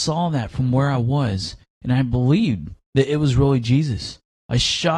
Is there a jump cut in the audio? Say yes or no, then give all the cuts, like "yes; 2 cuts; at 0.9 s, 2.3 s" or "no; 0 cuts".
no; 0 cuts